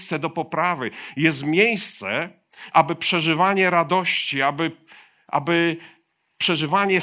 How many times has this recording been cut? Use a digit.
1